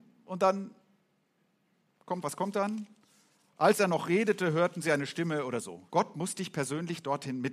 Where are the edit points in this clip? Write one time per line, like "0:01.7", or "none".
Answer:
0:02.2
0:05.9